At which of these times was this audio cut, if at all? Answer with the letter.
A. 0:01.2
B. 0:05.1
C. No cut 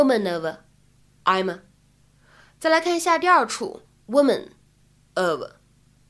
A